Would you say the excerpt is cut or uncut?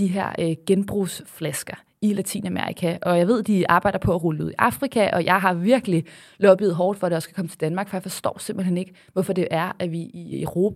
uncut